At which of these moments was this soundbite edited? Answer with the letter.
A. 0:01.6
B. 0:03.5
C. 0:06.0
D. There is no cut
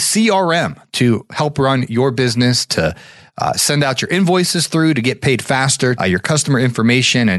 C